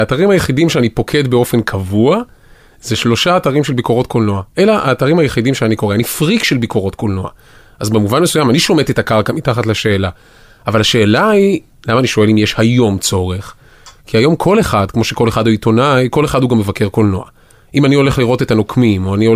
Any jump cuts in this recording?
no; 0 cuts

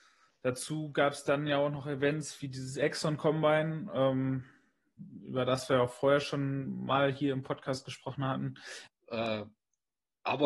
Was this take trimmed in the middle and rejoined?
yes; 1 cut; at 8.9 s

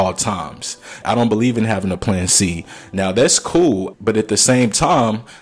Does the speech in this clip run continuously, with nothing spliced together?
no; 2 cuts; at 1.0 s, 3.9 s

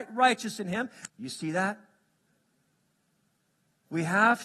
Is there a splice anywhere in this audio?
yes; 1 cut; at 1.1 s

